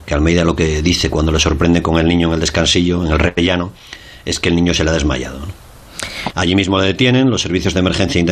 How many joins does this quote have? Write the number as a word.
one